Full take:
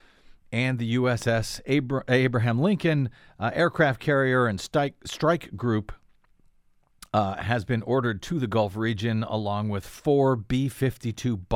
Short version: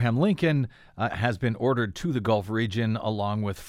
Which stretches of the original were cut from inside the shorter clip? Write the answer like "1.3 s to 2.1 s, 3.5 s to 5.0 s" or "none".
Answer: 3.5 s to 7.4 s